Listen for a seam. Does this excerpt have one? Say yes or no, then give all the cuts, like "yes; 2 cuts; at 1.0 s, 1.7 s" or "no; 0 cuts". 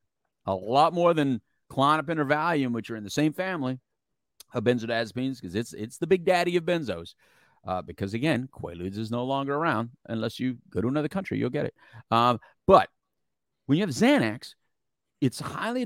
no; 0 cuts